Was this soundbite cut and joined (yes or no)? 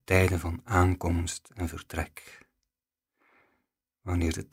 no